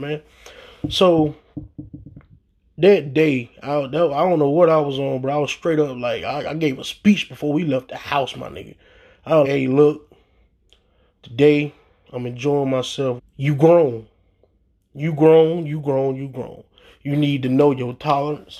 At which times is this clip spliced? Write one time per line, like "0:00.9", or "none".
0:09.4
0:13.2